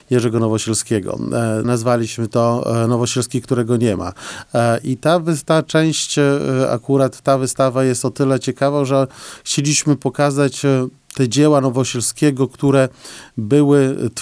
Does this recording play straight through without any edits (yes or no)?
no